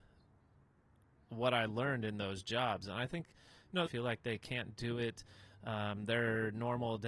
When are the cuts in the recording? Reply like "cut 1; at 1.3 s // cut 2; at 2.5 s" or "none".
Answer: cut 1; at 3.9 s